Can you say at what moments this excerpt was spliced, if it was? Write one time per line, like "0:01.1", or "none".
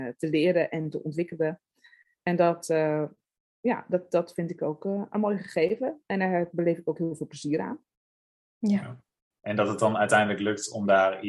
0:09.3

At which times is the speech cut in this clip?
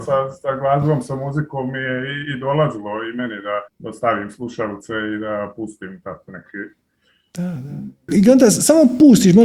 0:03.7
0:08.1

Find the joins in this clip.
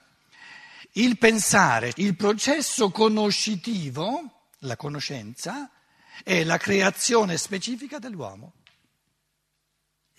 0:01.9

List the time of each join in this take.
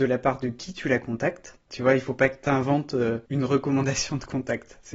0:01.7
0:03.3

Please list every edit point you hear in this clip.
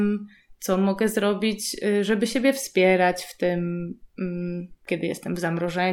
0:04.9

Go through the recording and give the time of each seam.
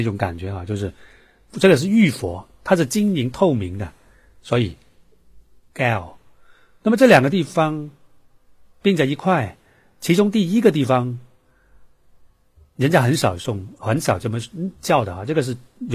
0:05.7

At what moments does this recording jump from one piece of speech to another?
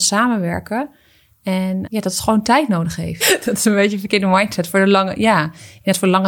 0:01.8
0:03.2

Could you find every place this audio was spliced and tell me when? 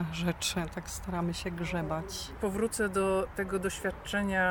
none

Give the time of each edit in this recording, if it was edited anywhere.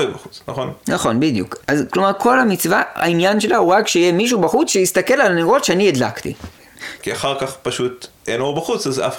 0:01.6
0:07.0

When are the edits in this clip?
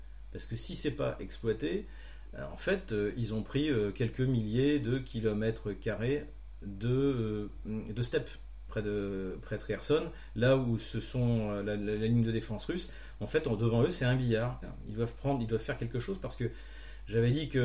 0:08.7
0:14.6

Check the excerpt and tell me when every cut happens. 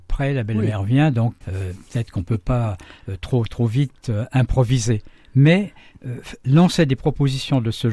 0:01.4

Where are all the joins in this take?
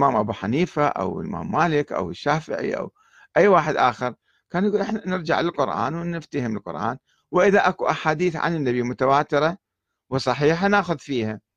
none

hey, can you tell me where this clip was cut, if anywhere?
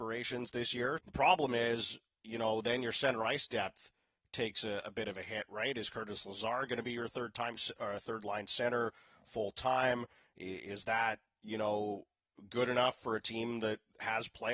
0:01.0

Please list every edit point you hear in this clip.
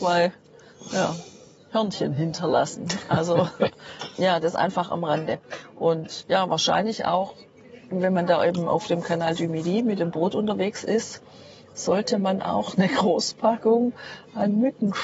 none

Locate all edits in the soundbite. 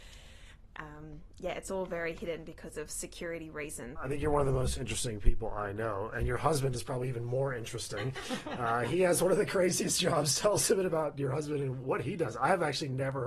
0:04.0
0:11.8

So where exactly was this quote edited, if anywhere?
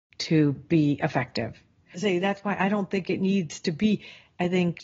0:01.9

